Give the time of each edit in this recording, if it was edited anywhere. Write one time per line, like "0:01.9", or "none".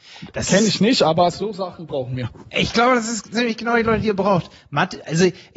none